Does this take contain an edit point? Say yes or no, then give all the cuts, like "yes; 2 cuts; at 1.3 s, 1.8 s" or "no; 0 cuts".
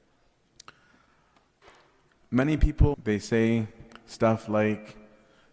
yes; 1 cut; at 2.9 s